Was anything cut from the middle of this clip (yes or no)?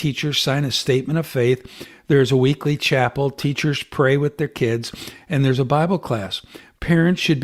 no